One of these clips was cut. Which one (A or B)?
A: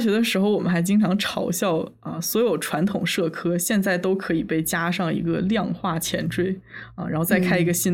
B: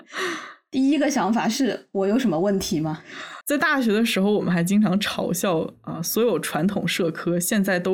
B